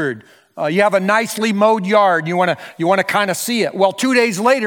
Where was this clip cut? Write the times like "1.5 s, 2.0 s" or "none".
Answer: none